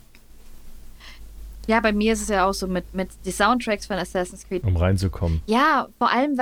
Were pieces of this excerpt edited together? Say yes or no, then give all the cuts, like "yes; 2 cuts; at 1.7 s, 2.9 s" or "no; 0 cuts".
yes; 1 cut; at 4.6 s